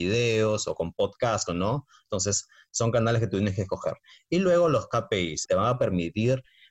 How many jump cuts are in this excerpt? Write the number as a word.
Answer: two